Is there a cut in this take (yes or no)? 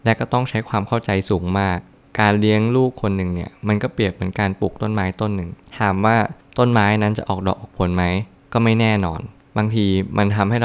no